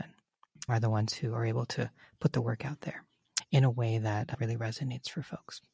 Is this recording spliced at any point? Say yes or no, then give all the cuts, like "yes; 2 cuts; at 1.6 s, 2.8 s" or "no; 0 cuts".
no; 0 cuts